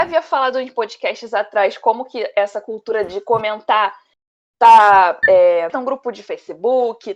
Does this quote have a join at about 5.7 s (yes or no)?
yes